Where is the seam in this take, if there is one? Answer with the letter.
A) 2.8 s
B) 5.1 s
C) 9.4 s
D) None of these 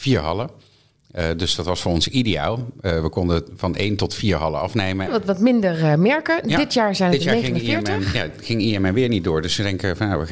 B